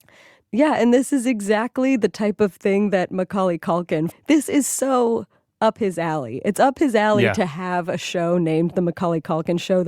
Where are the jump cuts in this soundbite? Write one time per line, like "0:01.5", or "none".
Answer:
0:04.1